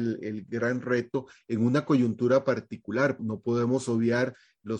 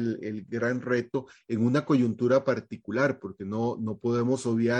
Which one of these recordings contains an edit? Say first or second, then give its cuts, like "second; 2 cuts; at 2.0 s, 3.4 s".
first; 1 cut; at 3.2 s